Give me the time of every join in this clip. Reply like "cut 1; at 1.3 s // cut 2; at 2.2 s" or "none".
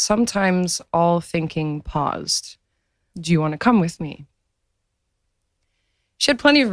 cut 1; at 3.1 s